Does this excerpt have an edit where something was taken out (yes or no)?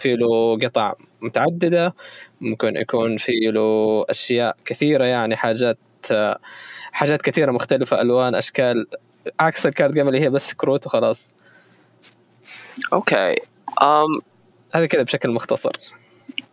no